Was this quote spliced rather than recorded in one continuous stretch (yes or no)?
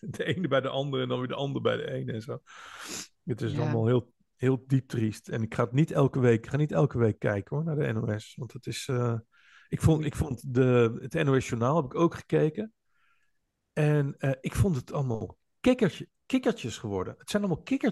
yes